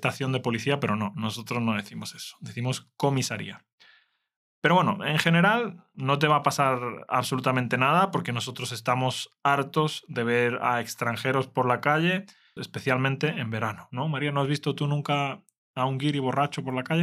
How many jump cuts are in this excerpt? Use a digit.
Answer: 2